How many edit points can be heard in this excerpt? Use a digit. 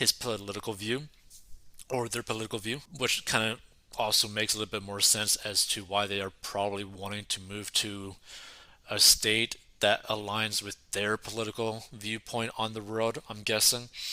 1